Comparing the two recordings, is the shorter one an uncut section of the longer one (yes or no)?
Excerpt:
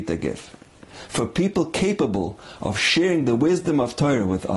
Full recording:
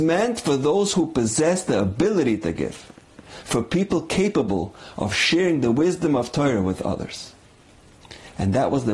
yes